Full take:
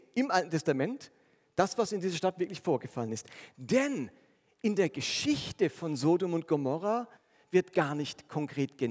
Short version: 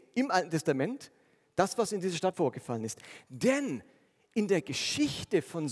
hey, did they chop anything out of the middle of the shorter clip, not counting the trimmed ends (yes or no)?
yes